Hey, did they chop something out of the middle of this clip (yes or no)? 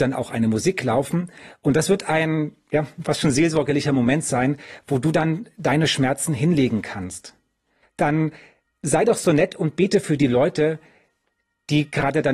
yes